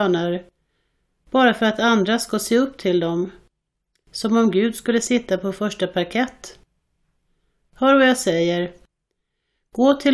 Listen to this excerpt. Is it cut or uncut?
uncut